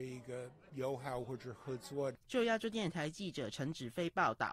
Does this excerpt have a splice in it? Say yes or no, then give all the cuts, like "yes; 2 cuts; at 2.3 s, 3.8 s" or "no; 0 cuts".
yes; 1 cut; at 2.2 s